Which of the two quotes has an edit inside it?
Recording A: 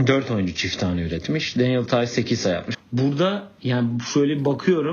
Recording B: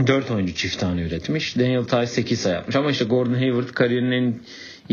A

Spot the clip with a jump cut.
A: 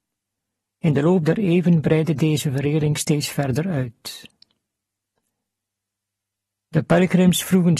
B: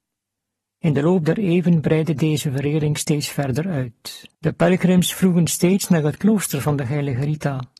B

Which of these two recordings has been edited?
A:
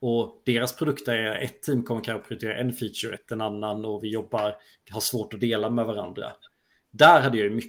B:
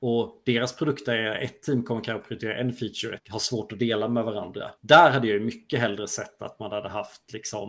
B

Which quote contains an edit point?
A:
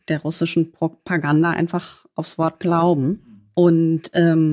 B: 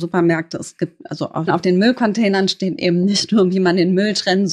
B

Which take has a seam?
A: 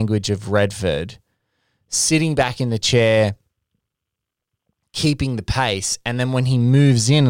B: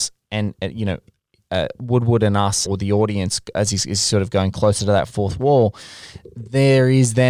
B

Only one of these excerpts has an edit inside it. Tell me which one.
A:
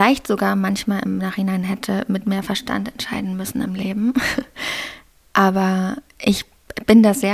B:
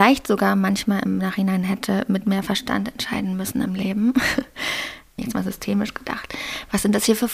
B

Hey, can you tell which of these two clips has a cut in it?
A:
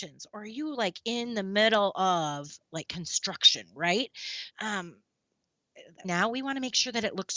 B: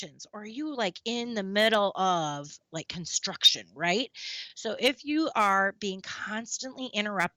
A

